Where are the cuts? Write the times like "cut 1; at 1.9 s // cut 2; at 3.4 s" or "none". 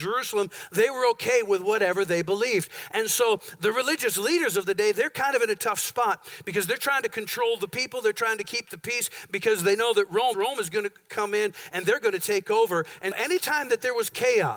cut 1; at 4.9 s // cut 2; at 10.3 s // cut 3; at 13.1 s